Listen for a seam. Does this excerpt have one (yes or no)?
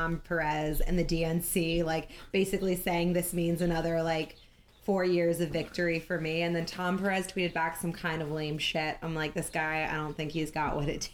no